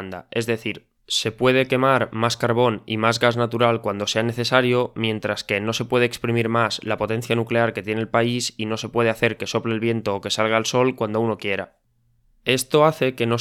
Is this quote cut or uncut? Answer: cut